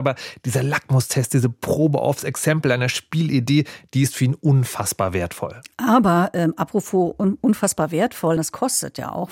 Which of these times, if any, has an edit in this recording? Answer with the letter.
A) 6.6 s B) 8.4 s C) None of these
B